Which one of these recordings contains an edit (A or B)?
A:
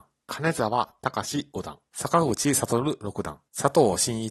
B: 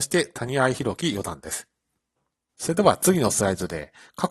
B